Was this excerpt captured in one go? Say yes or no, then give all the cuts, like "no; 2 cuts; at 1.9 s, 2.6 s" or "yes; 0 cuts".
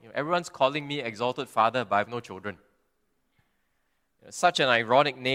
yes; 0 cuts